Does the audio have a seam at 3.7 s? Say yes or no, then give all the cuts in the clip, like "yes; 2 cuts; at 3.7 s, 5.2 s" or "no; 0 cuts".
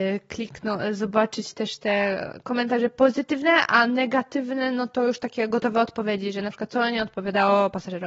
no; 0 cuts